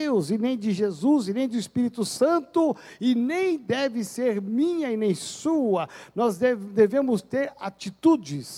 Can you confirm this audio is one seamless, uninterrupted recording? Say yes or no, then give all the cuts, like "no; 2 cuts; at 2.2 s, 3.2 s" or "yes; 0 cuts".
yes; 0 cuts